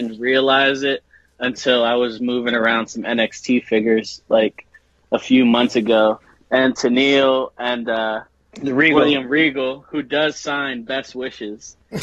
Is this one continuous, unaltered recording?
yes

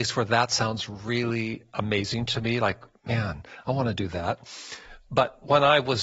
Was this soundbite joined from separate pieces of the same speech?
no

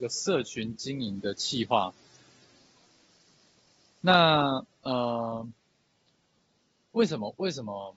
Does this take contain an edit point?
no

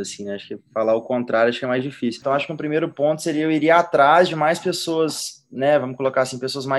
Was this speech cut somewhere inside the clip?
no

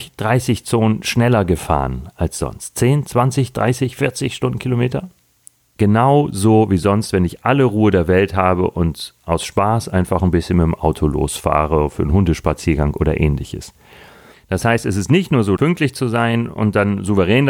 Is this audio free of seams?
no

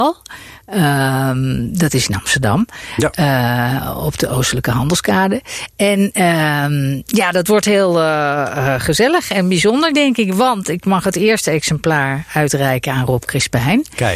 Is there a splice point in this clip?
no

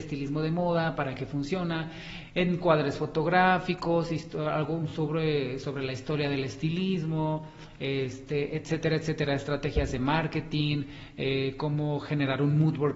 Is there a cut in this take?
no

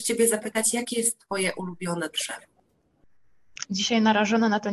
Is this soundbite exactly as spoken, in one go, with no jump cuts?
no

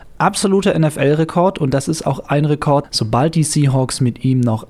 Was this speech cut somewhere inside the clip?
yes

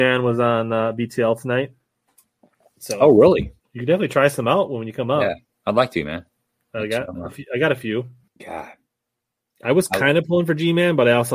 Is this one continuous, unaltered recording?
no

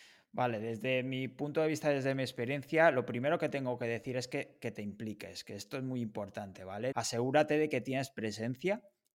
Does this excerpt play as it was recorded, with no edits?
no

